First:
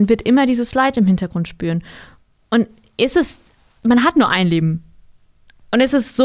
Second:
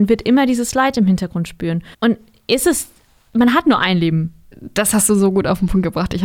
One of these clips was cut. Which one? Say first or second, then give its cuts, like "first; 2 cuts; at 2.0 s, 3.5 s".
second; 2 cuts; at 1.9 s, 4.5 s